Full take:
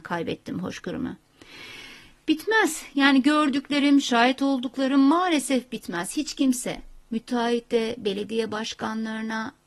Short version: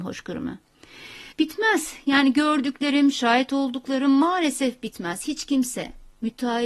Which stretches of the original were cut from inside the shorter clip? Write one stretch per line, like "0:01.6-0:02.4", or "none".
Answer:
0:01.9-0:02.2